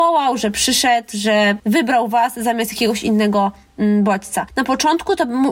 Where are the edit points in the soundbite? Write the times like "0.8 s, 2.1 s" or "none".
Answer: none